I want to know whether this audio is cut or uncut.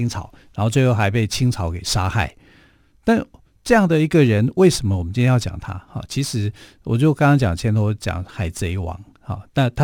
uncut